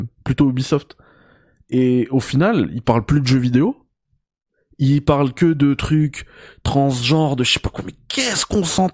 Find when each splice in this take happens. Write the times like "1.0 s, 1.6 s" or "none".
none

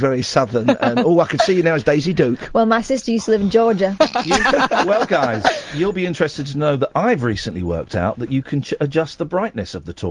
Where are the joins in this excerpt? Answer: 4.0 s

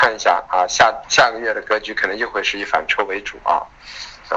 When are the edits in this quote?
1.0 s

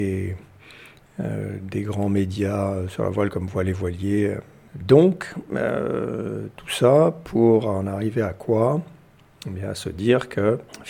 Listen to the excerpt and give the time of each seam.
none

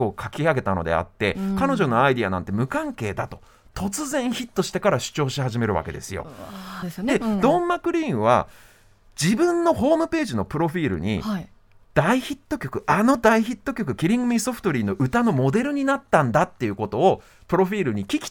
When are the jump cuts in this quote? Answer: 6.8 s

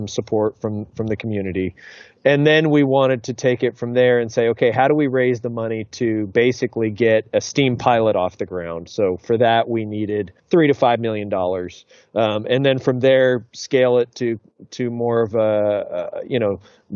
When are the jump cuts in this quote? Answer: 10.4 s

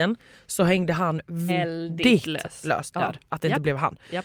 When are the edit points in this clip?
1.5 s, 2.9 s

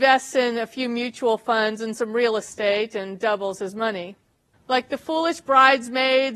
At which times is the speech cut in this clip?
4.5 s

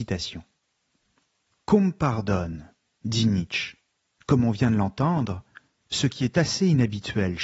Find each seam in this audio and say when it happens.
5.8 s

